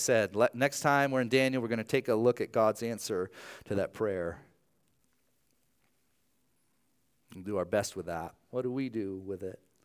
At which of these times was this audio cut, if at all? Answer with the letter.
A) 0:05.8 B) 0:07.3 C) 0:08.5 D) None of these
C